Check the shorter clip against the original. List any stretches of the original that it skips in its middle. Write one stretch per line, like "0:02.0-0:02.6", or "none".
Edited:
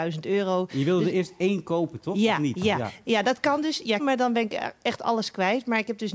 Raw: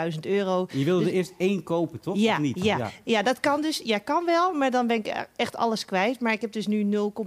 0:04.0-0:04.5

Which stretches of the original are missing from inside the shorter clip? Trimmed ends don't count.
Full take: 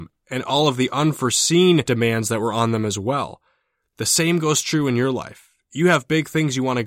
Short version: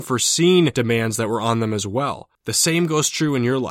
0:03.5-0:03.9

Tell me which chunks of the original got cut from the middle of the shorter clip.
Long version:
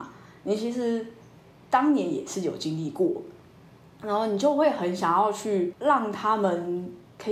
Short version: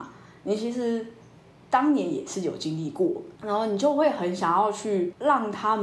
0:03.3-0:04.0

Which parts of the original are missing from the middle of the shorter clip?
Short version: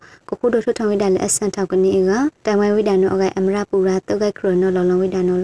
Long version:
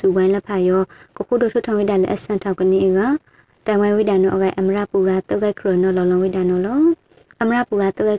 0:03.2-0:03.6

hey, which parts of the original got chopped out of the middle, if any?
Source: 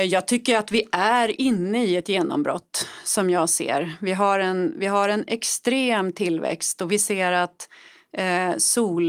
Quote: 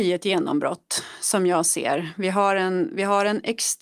none

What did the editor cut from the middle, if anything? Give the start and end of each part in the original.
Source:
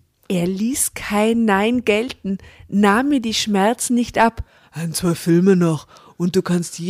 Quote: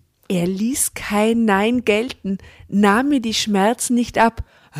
none

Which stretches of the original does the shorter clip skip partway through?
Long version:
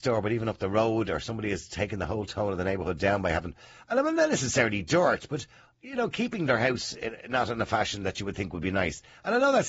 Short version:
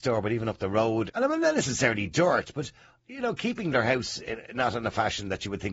0:01.1-0:03.8

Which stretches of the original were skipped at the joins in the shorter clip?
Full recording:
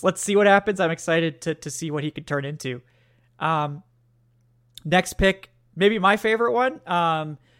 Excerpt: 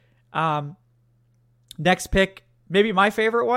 none

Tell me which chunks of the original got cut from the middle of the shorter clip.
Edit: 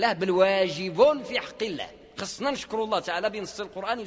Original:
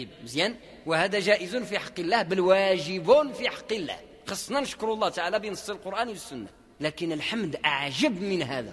none

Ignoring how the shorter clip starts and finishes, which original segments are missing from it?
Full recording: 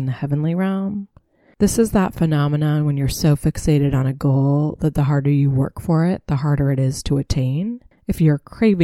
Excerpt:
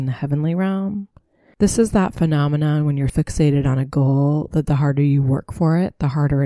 0:03.1-0:03.4

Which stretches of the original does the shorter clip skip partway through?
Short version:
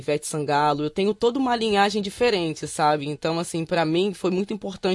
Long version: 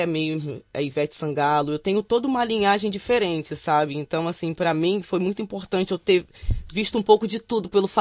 none

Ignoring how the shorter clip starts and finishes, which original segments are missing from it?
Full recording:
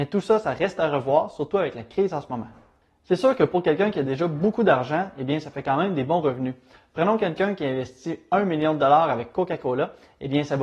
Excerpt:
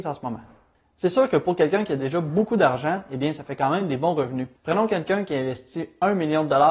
0:06.6-0:06.9

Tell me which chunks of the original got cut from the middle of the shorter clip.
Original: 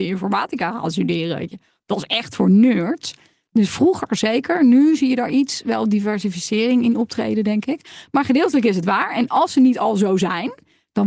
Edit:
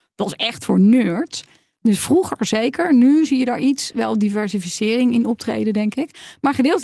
none

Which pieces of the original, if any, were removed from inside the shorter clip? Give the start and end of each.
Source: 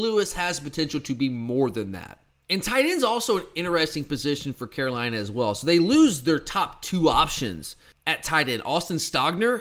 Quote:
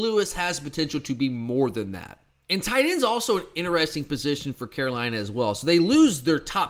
none

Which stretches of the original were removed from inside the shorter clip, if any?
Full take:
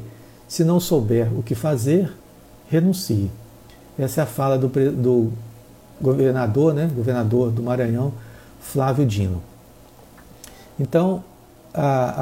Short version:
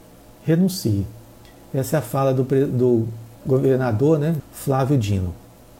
0:05.6-0:05.9
0:06.9-0:08.5

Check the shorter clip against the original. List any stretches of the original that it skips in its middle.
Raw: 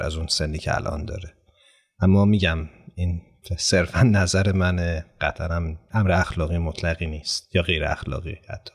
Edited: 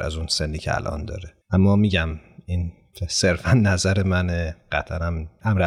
0:01.4-0:01.9

